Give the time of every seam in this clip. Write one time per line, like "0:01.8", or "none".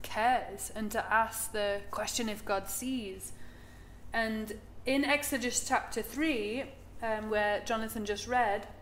none